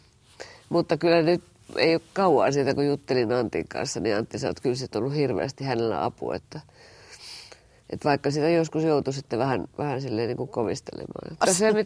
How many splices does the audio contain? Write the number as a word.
one